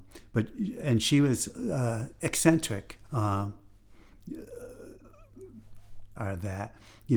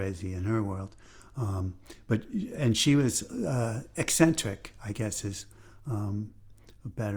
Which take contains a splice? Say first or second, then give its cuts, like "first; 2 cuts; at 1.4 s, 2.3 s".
first; 2 cuts; at 3.1 s, 6.2 s